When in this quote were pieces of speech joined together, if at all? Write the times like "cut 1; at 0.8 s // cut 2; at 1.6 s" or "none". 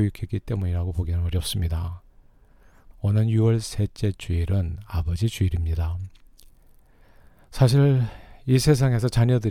cut 1; at 2.9 s